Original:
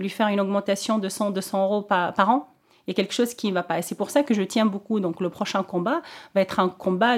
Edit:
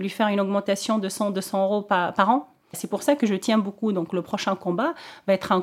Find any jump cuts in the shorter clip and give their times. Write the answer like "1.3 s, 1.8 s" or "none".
2.7 s